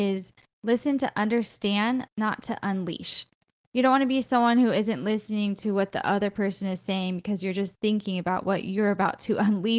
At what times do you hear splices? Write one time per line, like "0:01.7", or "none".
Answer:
none